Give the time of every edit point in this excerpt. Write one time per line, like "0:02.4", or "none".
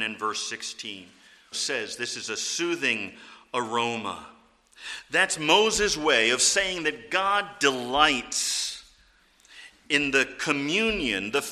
0:01.5